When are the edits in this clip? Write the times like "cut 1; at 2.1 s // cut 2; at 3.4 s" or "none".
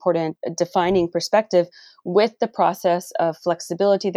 none